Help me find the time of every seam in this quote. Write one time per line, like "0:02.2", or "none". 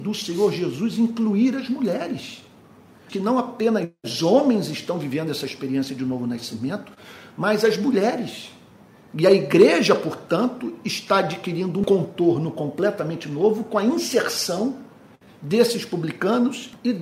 0:03.1

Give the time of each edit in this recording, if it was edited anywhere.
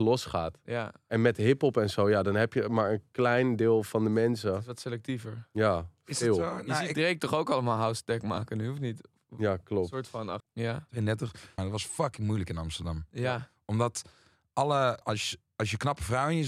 0:10.4
0:11.6
0:15.0

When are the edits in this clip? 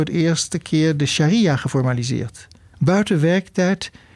0:02.7

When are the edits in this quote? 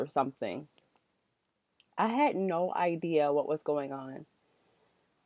none

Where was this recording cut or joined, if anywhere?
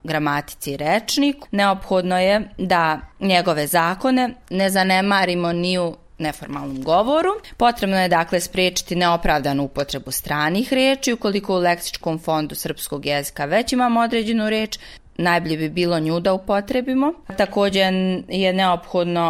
0:01.5

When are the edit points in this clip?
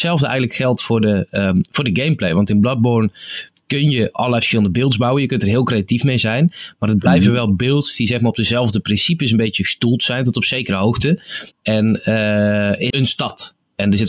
0:11.5
0:12.9

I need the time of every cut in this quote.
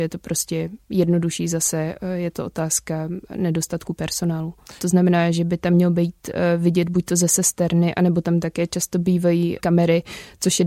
0:04.8

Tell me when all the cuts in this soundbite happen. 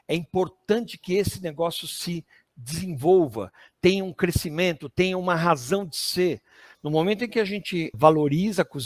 0:06.7
0:07.9

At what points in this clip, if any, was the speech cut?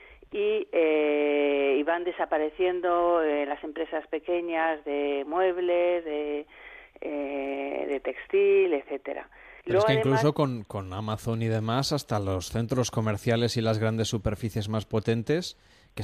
0:09.6

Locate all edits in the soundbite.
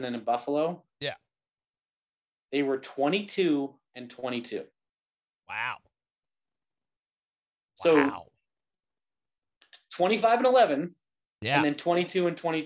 none

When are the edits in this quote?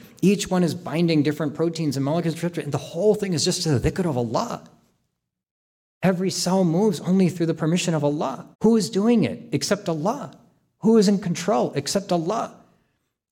0:08.5

